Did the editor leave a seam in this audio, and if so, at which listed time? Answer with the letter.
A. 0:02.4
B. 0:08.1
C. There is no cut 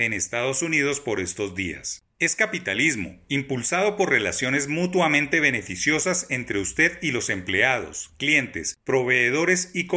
C